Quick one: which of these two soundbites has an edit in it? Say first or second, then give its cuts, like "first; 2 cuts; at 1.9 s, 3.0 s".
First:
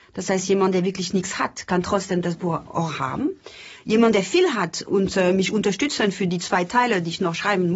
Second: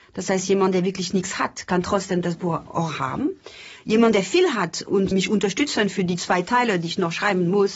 second; 1 cut; at 5.1 s